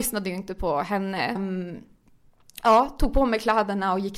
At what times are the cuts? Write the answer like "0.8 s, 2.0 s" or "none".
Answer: 1.4 s